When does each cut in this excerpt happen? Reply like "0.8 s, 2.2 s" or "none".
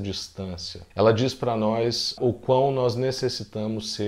0.9 s, 2.2 s